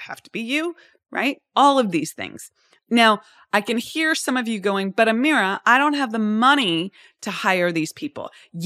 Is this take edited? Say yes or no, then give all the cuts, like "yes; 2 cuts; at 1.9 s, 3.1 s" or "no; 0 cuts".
no; 0 cuts